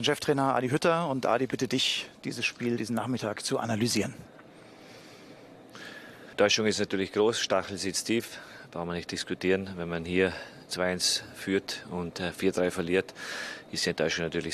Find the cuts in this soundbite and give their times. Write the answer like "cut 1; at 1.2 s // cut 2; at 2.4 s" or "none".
cut 1; at 6.3 s